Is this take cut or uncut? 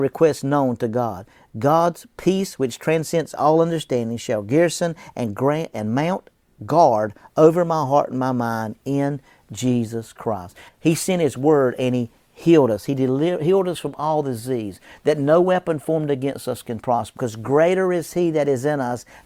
cut